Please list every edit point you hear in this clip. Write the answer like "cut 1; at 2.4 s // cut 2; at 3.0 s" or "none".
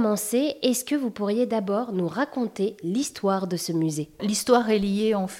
cut 1; at 4.2 s